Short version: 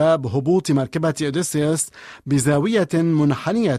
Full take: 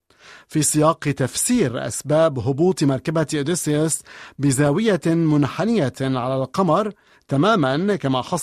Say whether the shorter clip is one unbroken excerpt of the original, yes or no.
yes